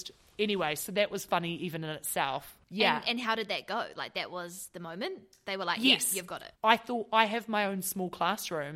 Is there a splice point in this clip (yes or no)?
yes